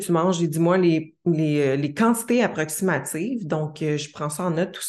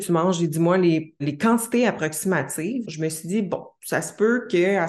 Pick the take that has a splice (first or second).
second